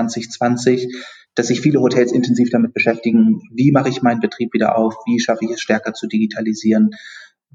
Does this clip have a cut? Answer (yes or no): no